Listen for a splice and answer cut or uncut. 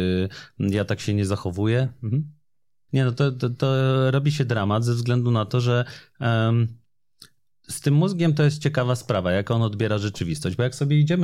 cut